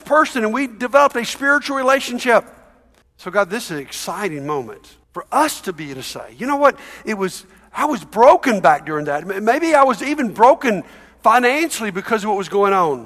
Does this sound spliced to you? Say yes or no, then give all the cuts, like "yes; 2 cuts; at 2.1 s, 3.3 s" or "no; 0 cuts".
yes; 2 cuts; at 3.0 s, 5.0 s